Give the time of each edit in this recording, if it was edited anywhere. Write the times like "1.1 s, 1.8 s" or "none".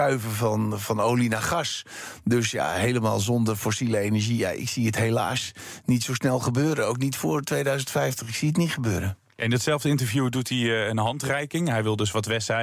none